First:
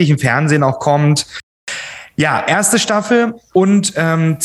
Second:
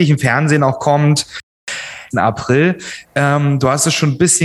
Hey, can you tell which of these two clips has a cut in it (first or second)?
second